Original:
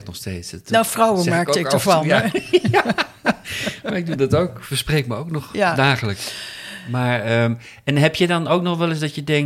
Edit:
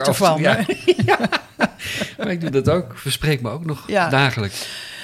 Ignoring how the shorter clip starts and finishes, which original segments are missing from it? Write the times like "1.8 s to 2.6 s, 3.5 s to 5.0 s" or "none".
none